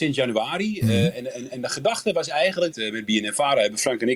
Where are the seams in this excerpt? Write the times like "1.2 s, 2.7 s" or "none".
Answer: 2.7 s